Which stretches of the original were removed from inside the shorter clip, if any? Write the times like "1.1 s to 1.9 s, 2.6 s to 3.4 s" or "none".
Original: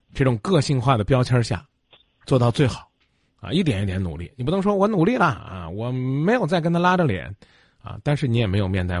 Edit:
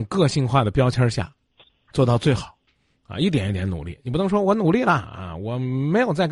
none